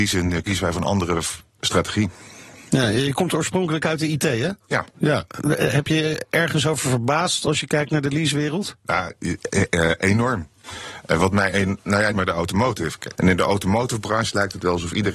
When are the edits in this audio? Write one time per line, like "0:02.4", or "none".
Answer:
0:12.1
0:13.2